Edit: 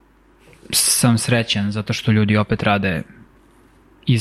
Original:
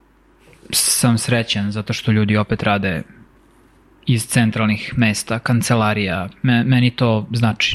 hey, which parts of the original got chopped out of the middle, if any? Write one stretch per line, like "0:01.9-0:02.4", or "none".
none